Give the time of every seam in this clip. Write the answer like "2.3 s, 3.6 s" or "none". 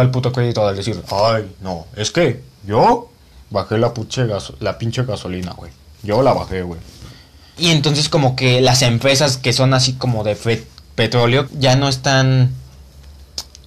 7.5 s, 11.5 s